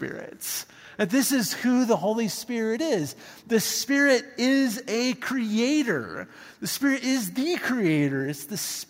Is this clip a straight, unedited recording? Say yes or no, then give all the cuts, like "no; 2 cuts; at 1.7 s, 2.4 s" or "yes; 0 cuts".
yes; 0 cuts